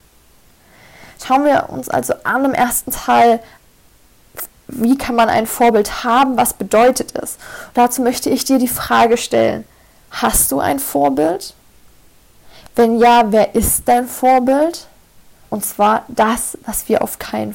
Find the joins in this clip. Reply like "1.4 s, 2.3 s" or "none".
15.4 s